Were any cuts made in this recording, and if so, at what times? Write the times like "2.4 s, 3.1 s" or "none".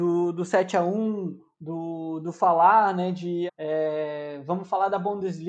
3.5 s